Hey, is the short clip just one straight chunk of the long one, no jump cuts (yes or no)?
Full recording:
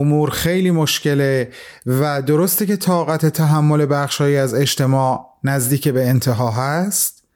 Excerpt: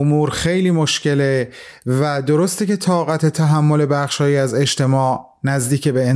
yes